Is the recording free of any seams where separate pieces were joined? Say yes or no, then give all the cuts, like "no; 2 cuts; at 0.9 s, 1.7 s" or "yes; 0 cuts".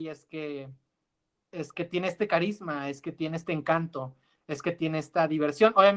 yes; 0 cuts